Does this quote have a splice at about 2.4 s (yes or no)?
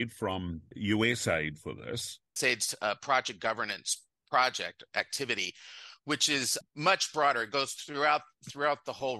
yes